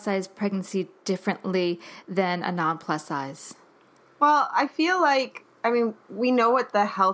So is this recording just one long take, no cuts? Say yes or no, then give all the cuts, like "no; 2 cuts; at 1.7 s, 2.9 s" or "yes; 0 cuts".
yes; 0 cuts